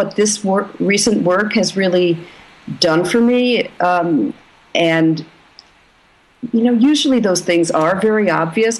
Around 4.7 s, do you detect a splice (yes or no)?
no